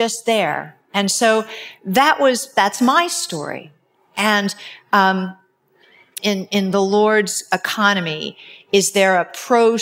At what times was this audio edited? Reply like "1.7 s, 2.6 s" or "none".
6.2 s